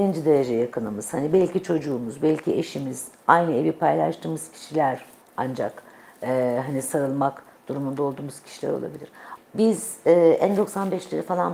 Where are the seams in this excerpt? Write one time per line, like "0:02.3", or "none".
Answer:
0:09.4